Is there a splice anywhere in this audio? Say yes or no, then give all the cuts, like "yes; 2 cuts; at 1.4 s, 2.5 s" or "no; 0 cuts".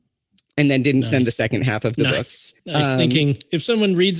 yes; 1 cut; at 2.6 s